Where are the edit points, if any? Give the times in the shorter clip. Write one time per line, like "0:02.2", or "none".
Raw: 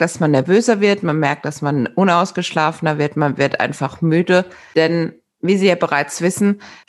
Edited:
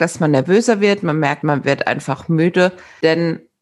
0:01.4